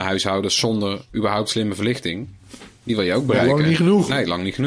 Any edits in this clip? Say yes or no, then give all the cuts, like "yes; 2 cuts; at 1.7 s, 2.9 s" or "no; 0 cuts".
no; 0 cuts